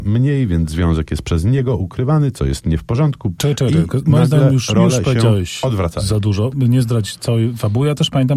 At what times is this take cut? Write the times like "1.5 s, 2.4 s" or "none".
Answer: 3.4 s

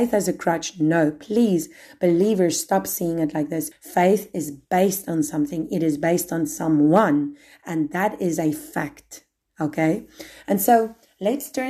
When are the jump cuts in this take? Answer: 3.7 s

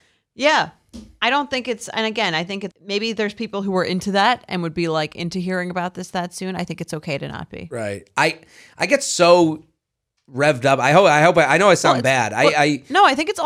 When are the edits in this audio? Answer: 2.7 s

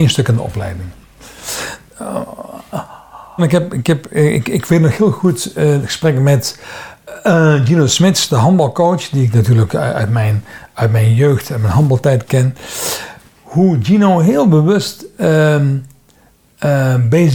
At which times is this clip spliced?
3.4 s

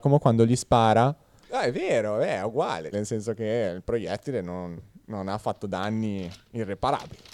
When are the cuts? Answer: 1.4 s, 2.9 s

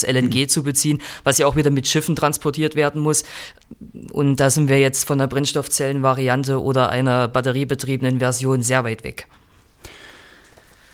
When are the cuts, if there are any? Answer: none

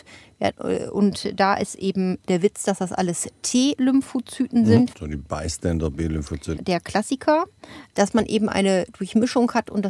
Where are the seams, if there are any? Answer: 4.9 s, 6.6 s, 7.9 s

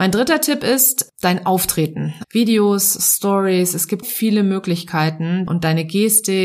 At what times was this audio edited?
2.2 s, 4.0 s, 5.5 s

